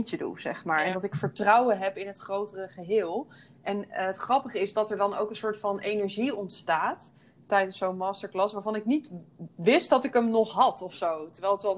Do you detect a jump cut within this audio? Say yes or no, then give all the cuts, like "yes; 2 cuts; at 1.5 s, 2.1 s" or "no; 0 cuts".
yes; 1 cut; at 4.7 s